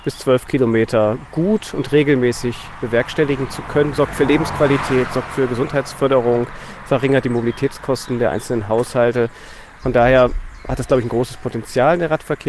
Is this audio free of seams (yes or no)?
yes